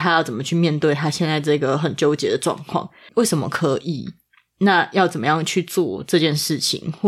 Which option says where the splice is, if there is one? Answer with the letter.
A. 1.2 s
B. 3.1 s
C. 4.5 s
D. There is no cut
B